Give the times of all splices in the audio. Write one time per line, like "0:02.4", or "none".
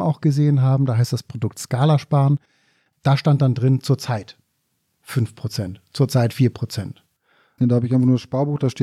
0:07.6